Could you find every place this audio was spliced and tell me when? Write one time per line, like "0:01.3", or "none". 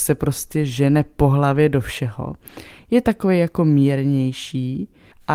none